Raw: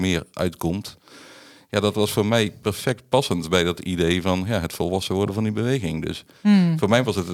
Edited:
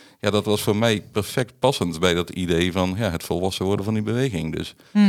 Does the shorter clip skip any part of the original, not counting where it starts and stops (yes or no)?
no